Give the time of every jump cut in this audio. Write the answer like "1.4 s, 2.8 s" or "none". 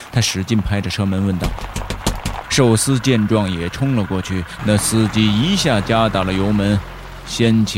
2.4 s, 4.6 s